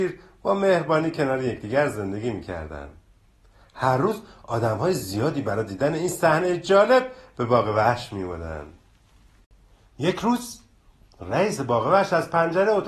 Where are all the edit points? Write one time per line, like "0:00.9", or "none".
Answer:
none

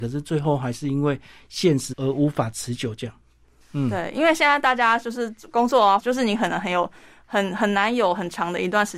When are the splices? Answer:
0:01.9
0:03.6
0:06.0

